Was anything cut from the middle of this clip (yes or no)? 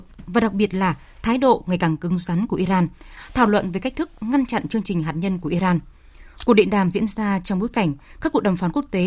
no